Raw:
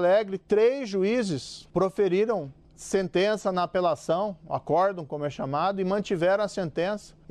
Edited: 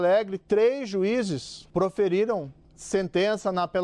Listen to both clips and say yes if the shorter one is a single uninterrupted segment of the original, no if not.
yes